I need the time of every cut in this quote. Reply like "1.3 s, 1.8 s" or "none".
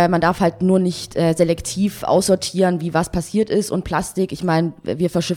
none